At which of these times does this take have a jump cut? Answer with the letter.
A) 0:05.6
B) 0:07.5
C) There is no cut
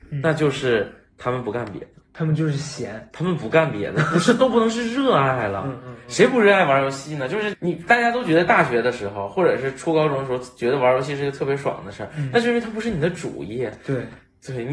B